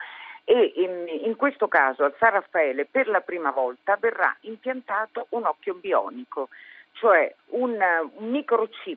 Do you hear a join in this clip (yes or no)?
yes